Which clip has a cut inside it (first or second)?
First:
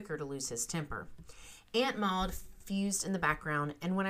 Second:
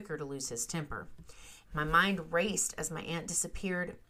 second